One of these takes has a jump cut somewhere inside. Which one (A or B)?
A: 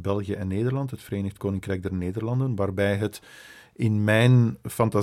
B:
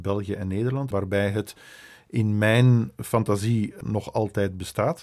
B